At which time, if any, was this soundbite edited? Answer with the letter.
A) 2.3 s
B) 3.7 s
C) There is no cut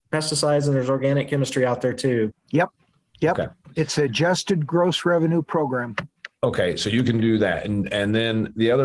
A